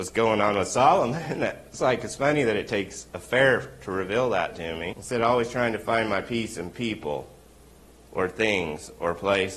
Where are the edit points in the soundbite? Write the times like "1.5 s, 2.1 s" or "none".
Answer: 4.9 s